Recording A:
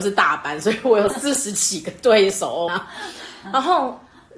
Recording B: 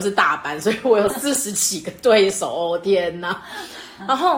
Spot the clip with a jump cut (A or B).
A